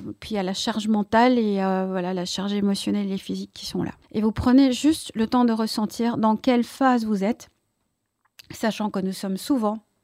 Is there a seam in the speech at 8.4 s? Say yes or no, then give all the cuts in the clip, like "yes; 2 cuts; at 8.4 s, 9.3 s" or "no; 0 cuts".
no; 1 cut; at 4.0 s